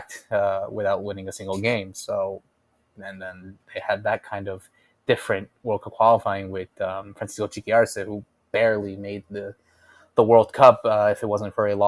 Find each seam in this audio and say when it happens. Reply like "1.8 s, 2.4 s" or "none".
none

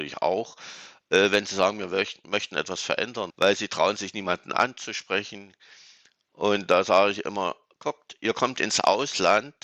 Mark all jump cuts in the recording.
3.3 s

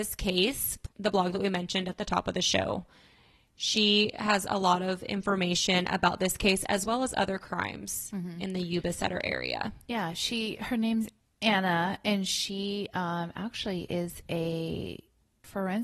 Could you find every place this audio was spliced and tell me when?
0.9 s

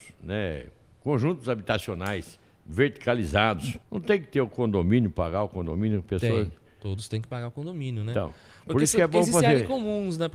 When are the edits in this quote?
3.8 s

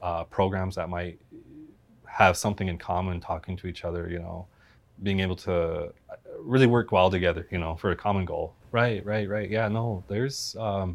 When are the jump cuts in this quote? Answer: 8.6 s

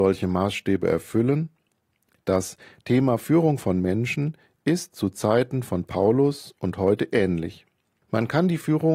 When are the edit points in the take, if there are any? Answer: 8.0 s

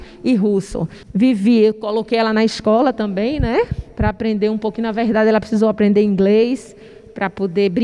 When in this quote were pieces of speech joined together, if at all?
1.0 s

